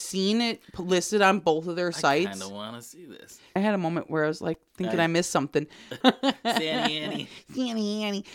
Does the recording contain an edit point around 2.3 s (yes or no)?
no